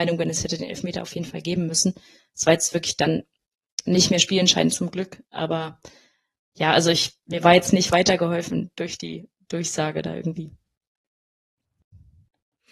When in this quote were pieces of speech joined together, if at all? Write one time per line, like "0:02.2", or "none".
none